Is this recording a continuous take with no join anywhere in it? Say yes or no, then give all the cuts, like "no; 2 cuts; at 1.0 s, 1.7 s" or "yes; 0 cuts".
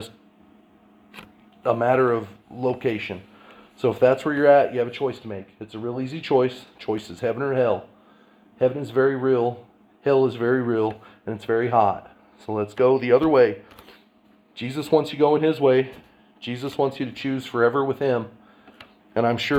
yes; 0 cuts